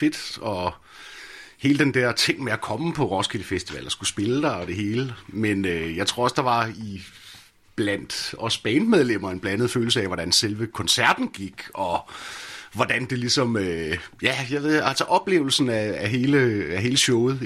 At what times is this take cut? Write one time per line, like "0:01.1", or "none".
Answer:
none